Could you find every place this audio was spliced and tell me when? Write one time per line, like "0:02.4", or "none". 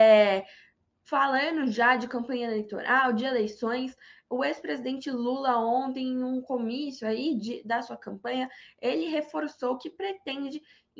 none

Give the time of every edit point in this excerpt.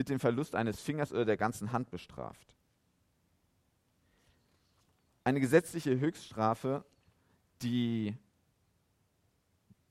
none

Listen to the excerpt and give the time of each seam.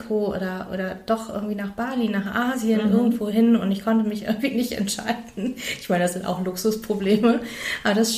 none

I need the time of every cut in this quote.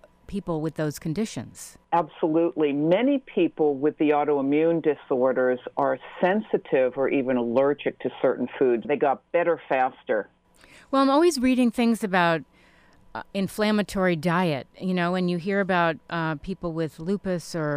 0:01.8
0:08.8

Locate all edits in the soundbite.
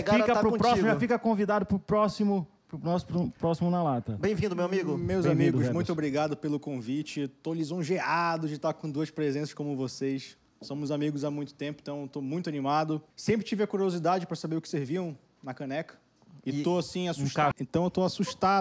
0:13.1
0:17.5

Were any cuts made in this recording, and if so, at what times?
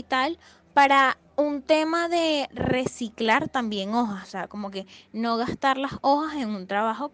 0:01.3
0:04.2

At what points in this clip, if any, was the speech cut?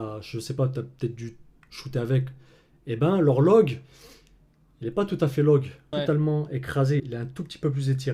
0:05.9
0:07.0

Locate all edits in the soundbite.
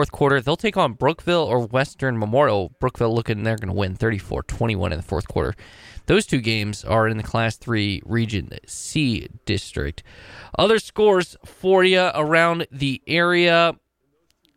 none

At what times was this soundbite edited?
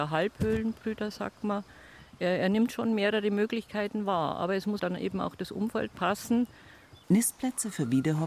0:04.8
0:07.0

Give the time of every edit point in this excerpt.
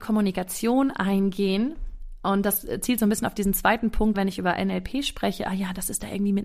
0:04.1

